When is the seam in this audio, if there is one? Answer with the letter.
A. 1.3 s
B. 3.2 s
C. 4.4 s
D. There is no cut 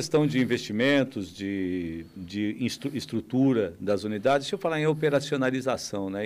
D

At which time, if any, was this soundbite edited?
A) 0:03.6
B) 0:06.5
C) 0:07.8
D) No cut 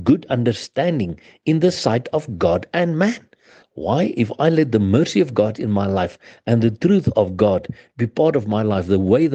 A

